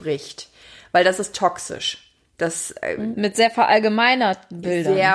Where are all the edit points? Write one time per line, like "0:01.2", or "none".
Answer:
0:03.1